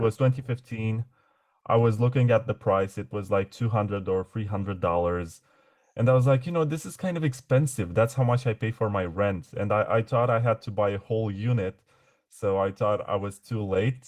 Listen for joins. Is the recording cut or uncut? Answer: uncut